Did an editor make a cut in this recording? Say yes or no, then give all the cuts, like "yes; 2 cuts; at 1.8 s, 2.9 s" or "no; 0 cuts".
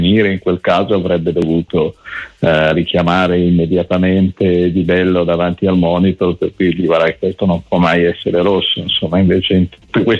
no; 0 cuts